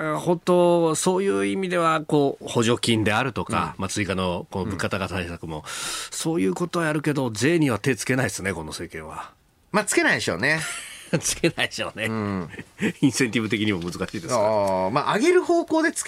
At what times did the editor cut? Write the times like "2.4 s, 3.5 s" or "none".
none